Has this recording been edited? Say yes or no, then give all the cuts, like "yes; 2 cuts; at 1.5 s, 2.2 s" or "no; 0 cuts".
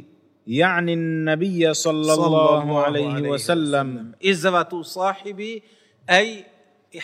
no; 0 cuts